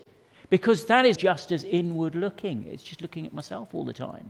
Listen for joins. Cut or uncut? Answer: cut